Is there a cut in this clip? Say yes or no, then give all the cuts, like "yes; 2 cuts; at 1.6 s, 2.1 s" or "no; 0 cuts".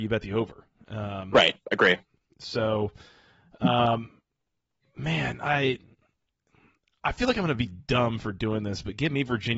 no; 0 cuts